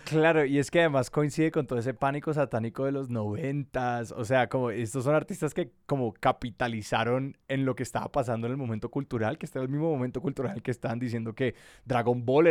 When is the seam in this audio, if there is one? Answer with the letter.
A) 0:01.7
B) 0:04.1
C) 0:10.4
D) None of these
D